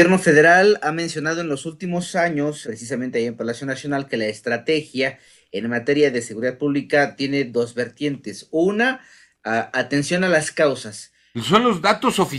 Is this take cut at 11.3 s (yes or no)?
yes